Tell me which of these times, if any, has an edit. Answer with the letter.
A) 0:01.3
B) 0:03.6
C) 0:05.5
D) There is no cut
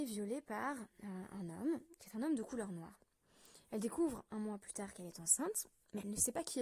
D